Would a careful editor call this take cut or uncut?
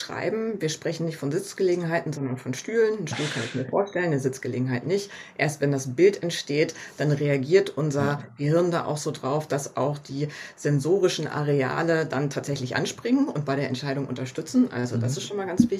uncut